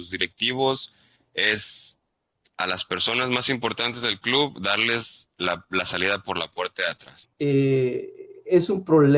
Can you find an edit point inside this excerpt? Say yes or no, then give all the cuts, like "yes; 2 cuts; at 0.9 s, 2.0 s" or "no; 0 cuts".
yes; 1 cut; at 7.3 s